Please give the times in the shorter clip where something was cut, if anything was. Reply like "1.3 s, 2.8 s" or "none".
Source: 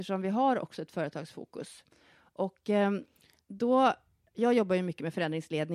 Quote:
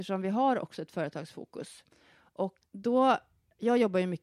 2.6 s